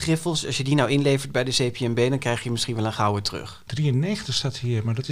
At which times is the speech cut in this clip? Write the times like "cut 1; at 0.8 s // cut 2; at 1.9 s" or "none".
cut 1; at 3.7 s